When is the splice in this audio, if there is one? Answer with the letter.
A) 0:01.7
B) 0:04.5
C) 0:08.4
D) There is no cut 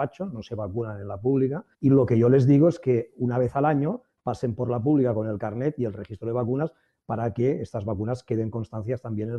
A